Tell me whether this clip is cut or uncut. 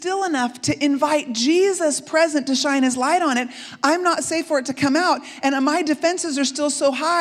uncut